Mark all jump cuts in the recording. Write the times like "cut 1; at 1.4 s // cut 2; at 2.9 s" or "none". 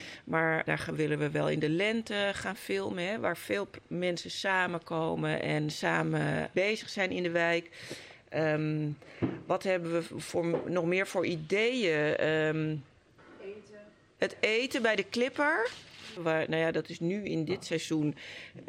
cut 1; at 16.2 s